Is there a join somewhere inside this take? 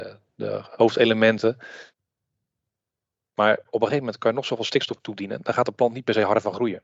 no; 0 cuts

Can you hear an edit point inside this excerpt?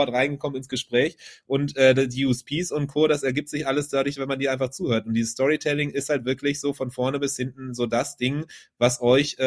no; 0 cuts

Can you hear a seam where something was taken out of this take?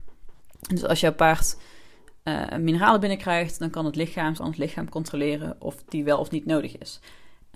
yes; 1 cut; at 4.4 s

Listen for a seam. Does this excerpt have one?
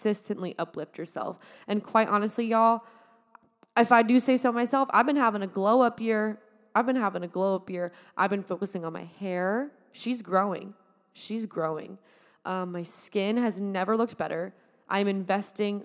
no; 0 cuts

